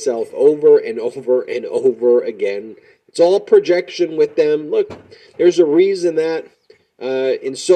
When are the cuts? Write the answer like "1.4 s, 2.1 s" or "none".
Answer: none